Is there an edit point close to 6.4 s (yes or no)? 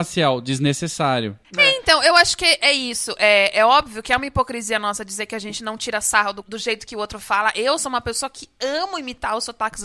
yes